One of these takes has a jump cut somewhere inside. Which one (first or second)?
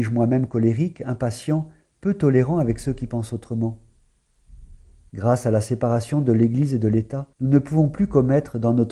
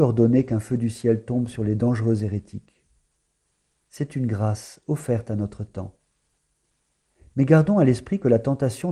first